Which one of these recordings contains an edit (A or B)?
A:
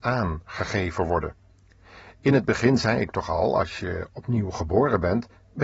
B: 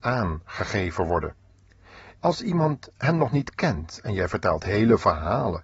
B